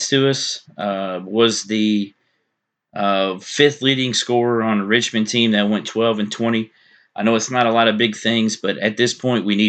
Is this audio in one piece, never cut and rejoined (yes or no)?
yes